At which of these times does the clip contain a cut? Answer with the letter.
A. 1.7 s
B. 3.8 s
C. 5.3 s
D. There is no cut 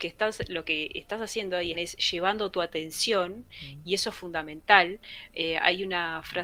A